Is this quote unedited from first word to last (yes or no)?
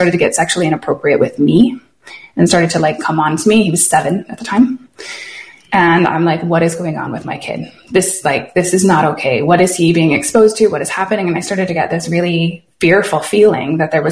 yes